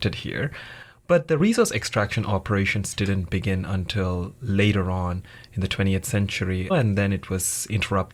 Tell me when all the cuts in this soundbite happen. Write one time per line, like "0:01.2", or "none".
0:06.7